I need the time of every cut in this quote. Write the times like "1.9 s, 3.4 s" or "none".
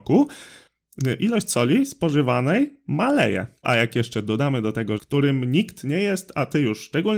3.6 s, 5.0 s